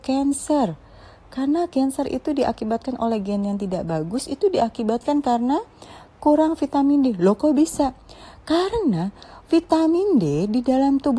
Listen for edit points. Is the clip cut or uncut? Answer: uncut